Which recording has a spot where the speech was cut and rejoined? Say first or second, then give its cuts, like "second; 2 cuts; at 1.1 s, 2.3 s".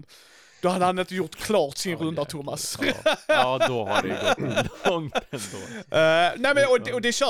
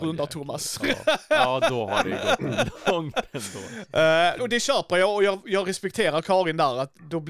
second; 1 cut; at 4.4 s